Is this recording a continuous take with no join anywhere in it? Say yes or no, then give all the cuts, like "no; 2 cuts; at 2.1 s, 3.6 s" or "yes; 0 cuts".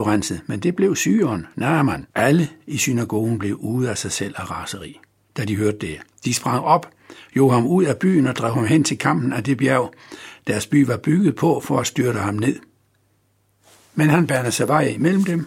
no; 1 cut; at 2.1 s